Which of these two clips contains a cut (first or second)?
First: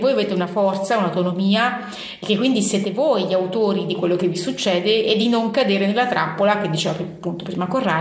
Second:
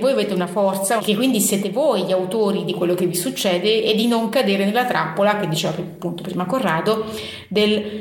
second